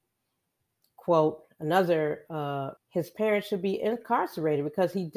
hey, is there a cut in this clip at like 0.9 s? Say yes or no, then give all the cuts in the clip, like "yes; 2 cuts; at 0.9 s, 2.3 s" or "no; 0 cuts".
no; 1 cut; at 2.8 s